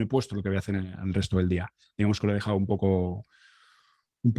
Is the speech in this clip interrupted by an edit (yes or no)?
no